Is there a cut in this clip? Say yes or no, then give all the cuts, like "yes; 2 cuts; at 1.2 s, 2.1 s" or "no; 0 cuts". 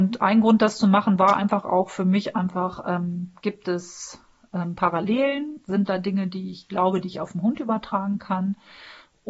no; 0 cuts